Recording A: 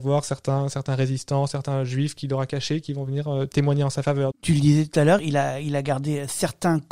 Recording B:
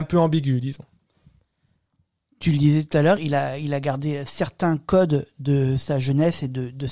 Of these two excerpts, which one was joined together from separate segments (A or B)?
A